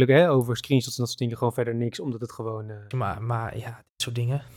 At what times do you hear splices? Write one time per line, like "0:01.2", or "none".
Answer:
0:02.9